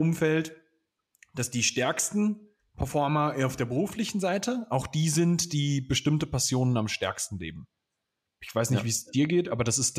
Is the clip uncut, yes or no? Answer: yes